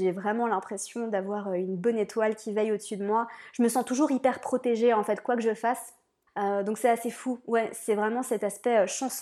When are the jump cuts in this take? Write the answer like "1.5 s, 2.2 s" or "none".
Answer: 6.3 s